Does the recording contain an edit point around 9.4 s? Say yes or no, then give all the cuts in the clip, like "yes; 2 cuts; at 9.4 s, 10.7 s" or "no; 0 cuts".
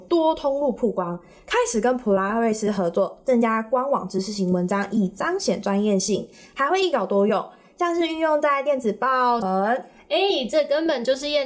yes; 1 cut; at 9.4 s